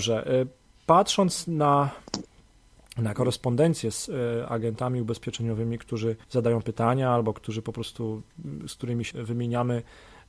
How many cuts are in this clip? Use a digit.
2